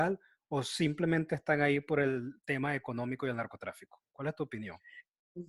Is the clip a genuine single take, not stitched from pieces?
yes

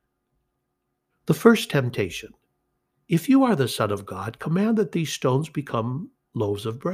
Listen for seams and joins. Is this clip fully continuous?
no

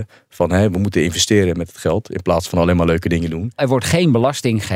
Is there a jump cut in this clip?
yes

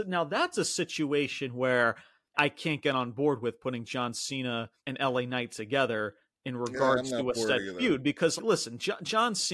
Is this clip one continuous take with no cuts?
no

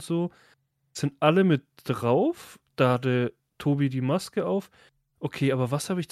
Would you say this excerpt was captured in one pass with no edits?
yes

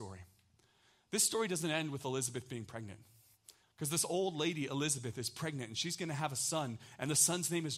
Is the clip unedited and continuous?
no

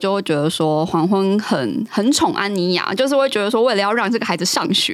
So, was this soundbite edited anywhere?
no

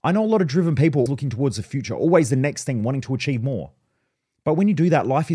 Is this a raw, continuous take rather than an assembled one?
no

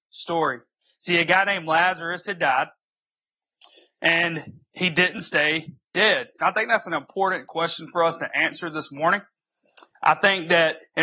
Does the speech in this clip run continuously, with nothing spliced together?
no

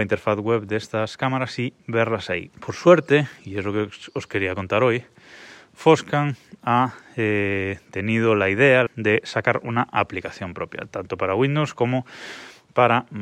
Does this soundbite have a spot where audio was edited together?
yes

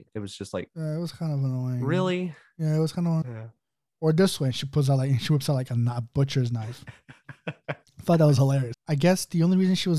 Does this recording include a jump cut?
yes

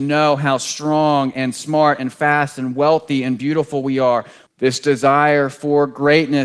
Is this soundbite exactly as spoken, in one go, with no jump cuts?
no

